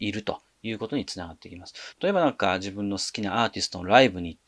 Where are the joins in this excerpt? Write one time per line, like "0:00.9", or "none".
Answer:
0:01.9